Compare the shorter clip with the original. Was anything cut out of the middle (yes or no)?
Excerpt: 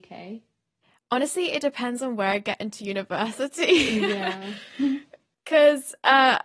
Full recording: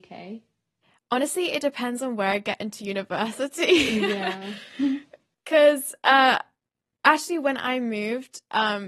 no